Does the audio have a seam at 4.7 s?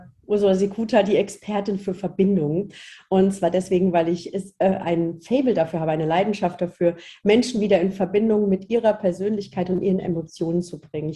no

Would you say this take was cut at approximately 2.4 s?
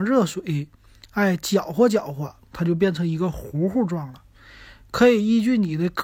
no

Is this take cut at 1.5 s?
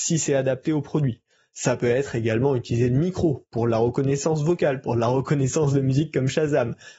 no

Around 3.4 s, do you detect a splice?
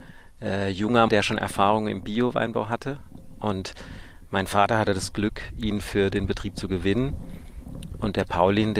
no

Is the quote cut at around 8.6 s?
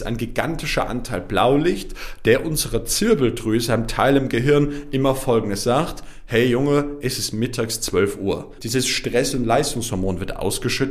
yes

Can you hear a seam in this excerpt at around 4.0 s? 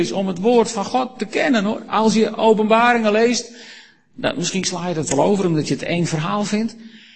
no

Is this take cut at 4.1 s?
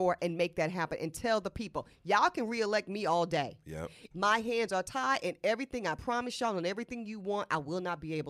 yes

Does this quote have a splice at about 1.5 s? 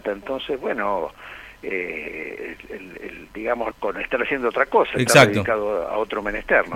no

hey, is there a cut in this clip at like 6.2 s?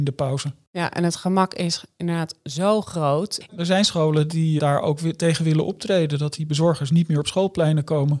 no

